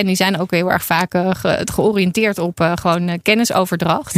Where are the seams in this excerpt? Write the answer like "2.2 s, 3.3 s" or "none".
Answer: none

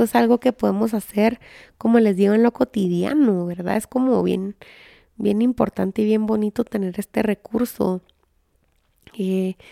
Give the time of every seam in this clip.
none

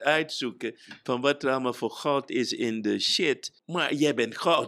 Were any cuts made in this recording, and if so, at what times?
3.6 s

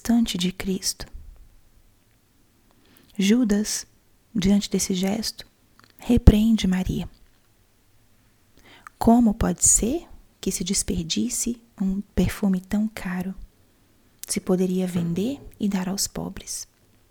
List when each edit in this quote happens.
none

